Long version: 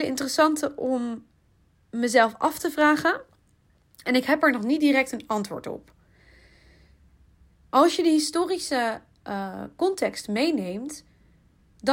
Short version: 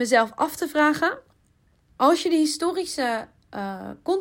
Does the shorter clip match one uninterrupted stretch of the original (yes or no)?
no